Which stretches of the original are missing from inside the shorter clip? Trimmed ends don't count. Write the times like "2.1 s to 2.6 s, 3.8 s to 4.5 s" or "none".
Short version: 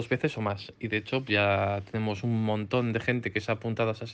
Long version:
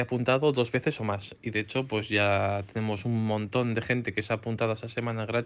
1.9 s to 2.1 s